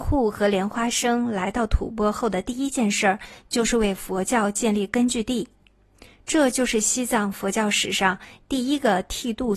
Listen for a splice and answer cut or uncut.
uncut